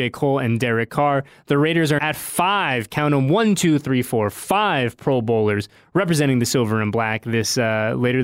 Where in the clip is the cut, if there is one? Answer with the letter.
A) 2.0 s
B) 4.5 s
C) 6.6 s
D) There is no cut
A